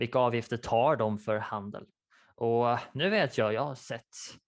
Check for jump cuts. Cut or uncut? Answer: uncut